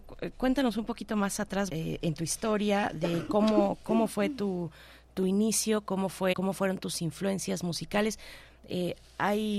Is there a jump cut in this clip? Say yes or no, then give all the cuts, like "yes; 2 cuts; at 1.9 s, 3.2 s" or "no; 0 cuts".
yes; 2 cuts; at 1.7 s, 6.3 s